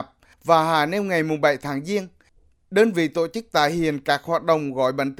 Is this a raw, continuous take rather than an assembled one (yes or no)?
yes